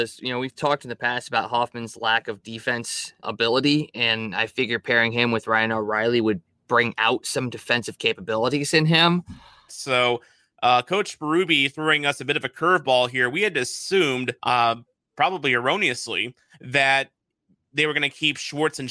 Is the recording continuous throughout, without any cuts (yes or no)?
no